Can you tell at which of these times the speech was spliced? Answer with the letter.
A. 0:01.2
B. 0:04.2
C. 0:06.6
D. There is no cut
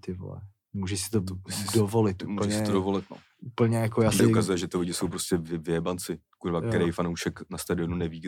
B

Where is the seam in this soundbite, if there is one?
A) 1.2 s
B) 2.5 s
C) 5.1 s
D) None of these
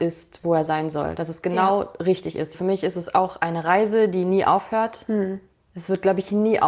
B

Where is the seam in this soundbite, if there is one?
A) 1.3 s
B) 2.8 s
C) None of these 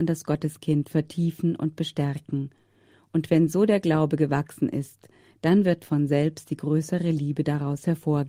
C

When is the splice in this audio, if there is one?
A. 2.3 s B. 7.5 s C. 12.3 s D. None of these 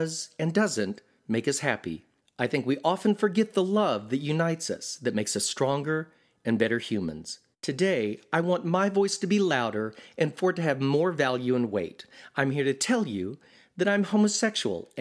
B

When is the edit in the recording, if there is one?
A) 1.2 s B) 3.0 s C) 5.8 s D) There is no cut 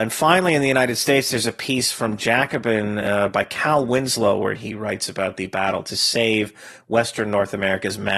D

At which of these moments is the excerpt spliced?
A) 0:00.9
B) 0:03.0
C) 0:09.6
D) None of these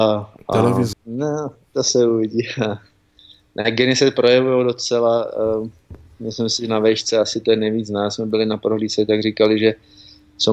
A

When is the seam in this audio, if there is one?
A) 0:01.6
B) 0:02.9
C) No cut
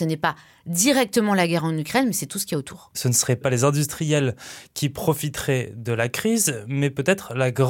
C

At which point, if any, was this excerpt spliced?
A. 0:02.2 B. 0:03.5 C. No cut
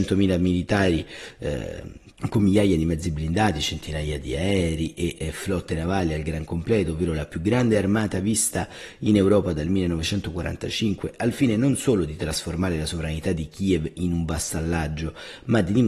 A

